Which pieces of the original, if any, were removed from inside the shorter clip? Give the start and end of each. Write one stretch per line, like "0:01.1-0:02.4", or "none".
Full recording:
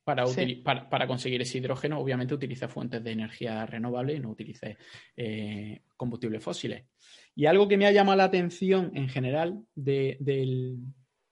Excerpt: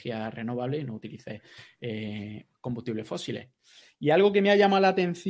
none